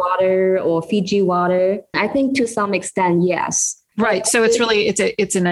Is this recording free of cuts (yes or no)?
no